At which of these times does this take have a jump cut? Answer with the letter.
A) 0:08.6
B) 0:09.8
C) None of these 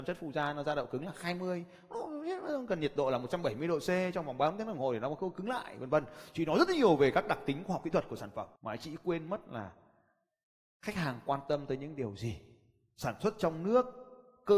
A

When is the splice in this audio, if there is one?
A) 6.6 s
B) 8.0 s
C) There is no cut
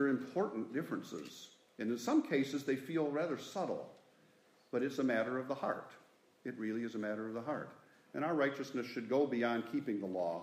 B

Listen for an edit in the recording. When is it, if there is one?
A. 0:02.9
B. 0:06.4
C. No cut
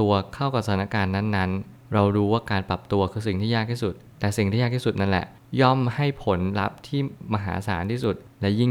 C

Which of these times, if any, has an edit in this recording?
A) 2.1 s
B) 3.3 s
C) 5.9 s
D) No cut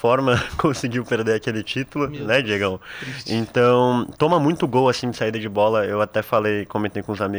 D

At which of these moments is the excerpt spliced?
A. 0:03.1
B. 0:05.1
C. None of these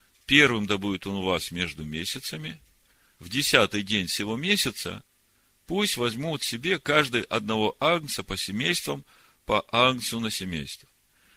A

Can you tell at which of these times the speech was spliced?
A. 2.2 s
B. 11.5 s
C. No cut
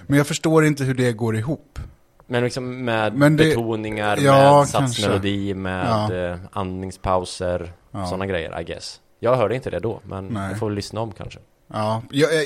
C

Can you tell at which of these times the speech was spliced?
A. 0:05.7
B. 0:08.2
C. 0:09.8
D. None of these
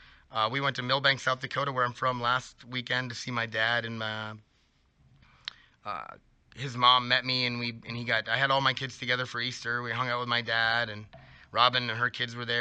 D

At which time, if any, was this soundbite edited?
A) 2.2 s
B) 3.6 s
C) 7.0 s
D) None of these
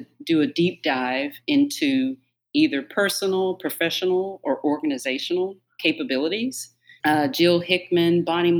C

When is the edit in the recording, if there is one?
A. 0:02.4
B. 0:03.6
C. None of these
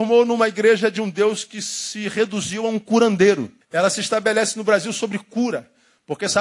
B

